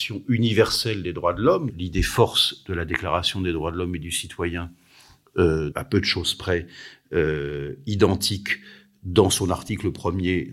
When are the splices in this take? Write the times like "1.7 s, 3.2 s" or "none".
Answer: 1.7 s, 5.7 s